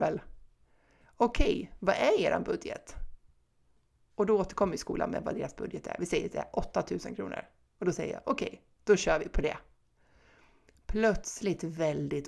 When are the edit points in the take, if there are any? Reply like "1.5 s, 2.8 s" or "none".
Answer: none